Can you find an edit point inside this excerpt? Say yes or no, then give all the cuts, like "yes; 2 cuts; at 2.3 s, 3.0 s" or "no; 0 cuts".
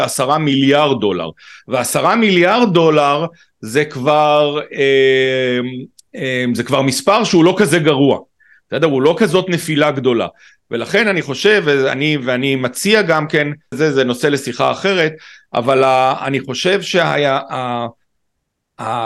yes; 1 cut; at 13.7 s